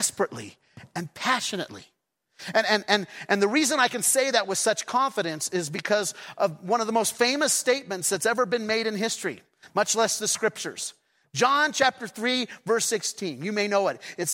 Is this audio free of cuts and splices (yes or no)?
yes